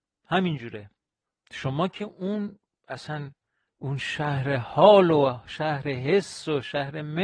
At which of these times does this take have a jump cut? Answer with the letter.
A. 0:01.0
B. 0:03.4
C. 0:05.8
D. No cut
D